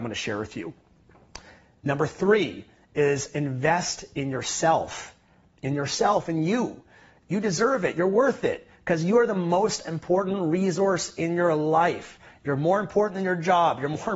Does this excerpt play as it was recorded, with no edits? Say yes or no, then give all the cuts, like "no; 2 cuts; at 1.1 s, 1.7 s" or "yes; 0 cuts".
yes; 0 cuts